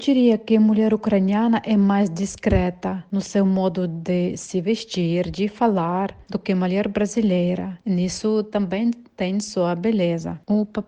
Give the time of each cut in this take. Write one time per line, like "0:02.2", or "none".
none